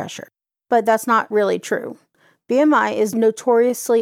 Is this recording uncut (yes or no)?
yes